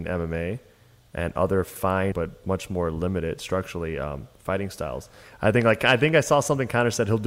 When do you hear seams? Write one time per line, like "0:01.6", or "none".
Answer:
0:02.1
0:05.2